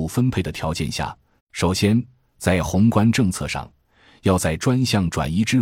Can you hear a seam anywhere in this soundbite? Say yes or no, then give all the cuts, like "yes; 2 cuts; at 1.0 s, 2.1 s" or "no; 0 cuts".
yes; 1 cut; at 1.4 s